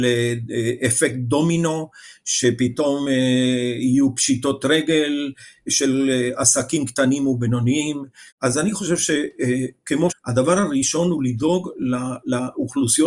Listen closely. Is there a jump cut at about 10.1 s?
yes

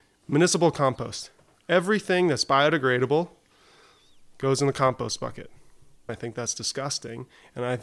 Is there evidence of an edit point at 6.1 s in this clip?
yes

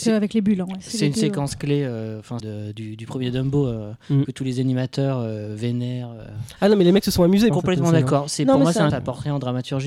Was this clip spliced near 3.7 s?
no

